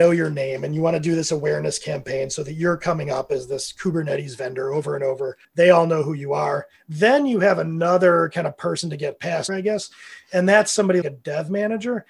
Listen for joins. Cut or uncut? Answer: cut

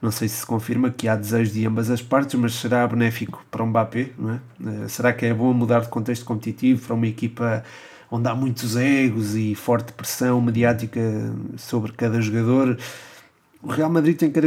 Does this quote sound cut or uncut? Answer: uncut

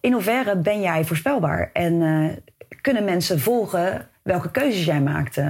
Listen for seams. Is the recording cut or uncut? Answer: uncut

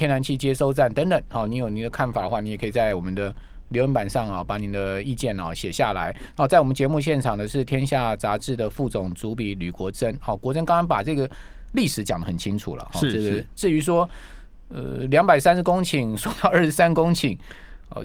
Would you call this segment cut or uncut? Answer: uncut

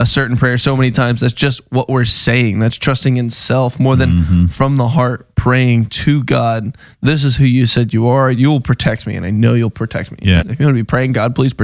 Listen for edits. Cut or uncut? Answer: cut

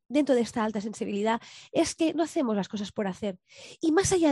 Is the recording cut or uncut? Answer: uncut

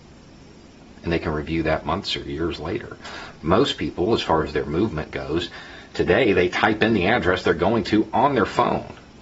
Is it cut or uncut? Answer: uncut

